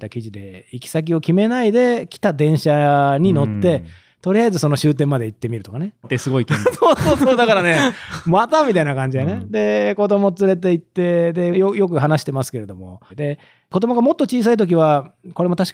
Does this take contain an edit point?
yes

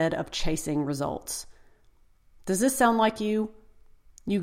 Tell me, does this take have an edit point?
no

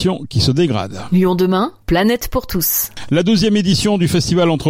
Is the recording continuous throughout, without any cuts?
no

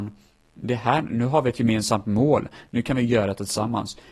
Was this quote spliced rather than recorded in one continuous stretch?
no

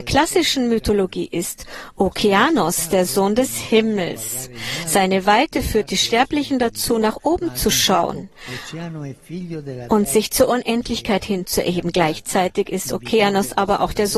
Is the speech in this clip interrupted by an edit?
no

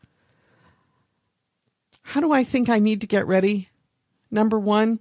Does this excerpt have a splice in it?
no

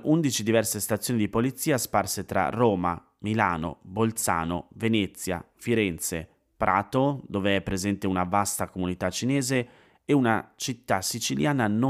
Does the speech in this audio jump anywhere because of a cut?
no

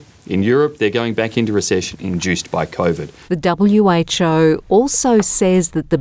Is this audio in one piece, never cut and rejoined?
no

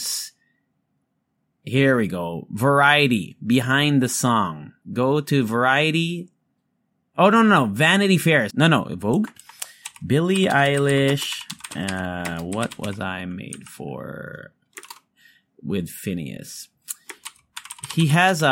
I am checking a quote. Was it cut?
yes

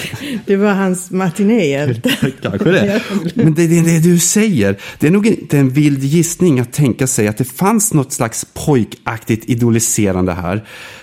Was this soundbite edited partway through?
no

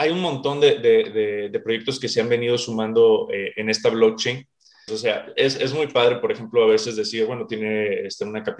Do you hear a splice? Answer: yes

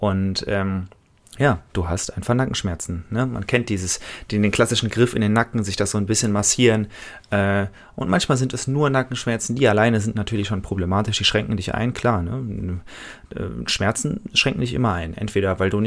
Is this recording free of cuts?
yes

